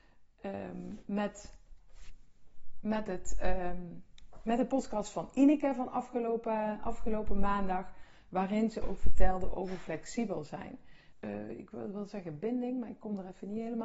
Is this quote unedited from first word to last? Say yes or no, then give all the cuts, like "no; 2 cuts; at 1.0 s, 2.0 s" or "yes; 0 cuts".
no; 1 cut; at 11.1 s